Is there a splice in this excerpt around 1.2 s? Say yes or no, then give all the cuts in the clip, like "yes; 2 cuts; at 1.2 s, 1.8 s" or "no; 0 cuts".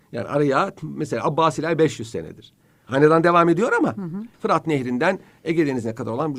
no; 2 cuts; at 2.8 s, 4.3 s